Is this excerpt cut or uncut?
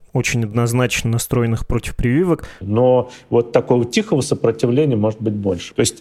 cut